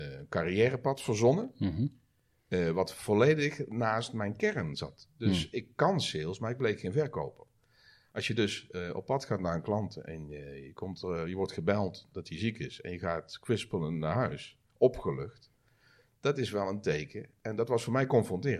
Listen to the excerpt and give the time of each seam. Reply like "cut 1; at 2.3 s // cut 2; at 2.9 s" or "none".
none